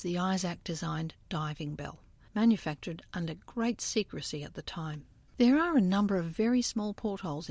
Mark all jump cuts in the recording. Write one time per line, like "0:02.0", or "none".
0:05.3